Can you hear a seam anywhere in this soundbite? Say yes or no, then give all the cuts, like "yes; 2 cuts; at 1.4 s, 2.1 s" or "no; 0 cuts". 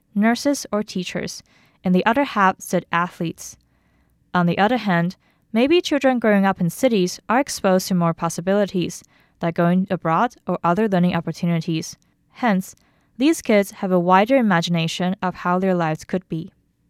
no; 0 cuts